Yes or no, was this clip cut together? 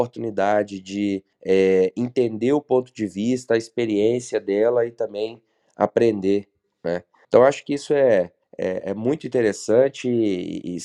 yes